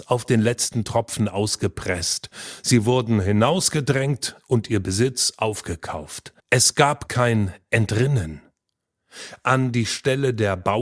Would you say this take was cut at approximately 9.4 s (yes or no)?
no